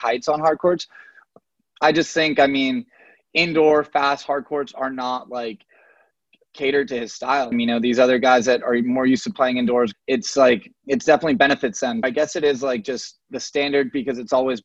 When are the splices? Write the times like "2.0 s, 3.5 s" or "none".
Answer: 7.5 s, 9.9 s, 12.0 s